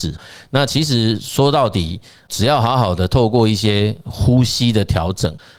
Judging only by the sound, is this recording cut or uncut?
uncut